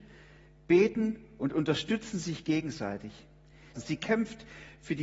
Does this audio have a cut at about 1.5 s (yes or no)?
no